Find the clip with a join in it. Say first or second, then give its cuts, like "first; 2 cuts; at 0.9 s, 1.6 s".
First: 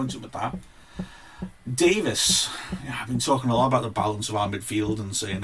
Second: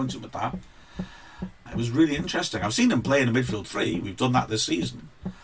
second; 1 cut; at 1.7 s